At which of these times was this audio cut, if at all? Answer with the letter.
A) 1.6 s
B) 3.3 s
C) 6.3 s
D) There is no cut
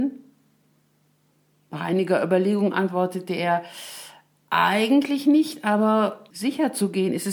C